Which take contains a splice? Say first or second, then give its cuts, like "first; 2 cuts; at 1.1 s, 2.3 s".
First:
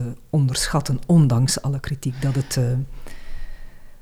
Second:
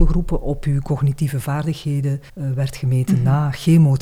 second; 1 cut; at 2.3 s